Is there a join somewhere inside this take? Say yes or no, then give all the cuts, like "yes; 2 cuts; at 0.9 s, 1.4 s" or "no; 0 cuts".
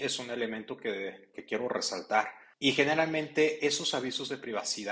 yes; 2 cuts; at 1.3 s, 2.5 s